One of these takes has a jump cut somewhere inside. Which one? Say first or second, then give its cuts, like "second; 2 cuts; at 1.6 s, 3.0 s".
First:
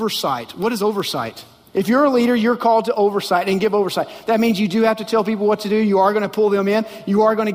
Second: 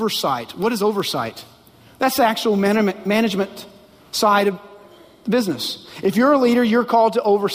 first; 1 cut; at 1.7 s